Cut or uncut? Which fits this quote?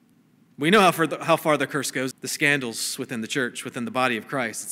cut